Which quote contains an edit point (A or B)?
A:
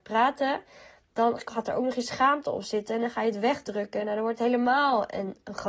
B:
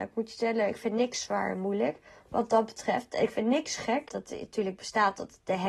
B